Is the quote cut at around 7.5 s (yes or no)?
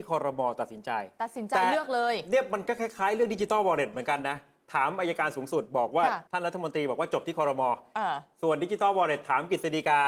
no